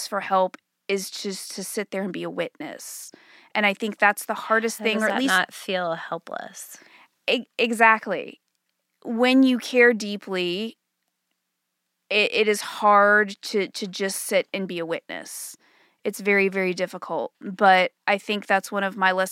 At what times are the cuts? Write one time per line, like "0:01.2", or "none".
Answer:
none